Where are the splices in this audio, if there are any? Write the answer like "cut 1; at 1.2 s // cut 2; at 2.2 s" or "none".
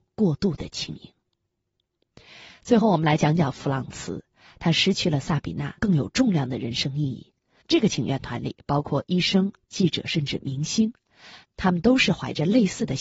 cut 1; at 5.8 s // cut 2; at 7.6 s // cut 3; at 9.6 s